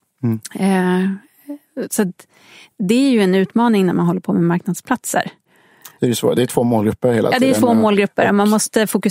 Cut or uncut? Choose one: uncut